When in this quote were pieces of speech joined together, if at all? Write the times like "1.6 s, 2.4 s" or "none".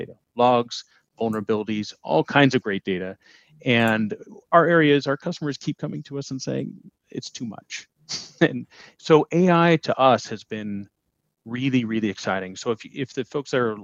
none